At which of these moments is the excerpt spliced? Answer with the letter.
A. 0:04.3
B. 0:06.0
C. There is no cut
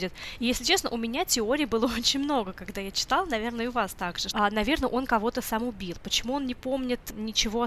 A